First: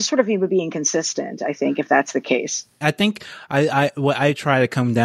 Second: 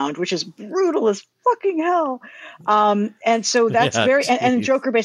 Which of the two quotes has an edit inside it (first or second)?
first